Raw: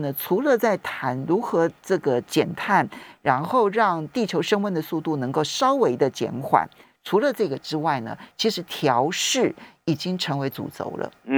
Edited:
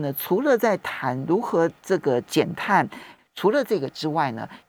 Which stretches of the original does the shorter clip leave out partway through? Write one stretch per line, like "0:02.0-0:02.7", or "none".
0:03.2-0:06.9

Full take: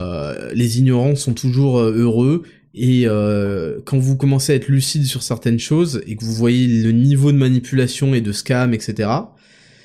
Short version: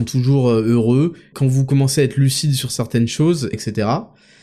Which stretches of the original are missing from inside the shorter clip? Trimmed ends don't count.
0:02.6-0:03.8
0:06.0-0:08.7

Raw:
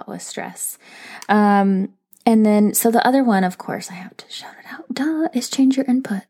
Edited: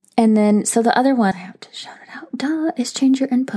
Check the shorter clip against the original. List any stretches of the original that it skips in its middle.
0:03.4-0:03.9

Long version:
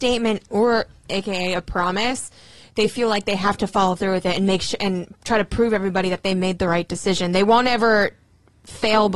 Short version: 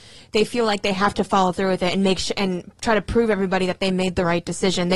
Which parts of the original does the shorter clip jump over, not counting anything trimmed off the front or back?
none

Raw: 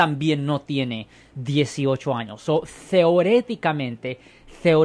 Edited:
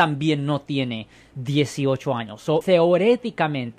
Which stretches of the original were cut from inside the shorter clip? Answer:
0:02.6-0:02.9

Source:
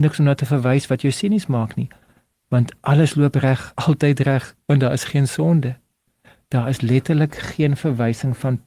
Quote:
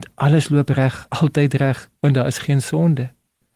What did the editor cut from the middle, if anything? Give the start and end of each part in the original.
none

